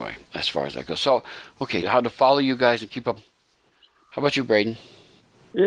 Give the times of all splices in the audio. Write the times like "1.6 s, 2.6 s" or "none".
1.8 s, 3.2 s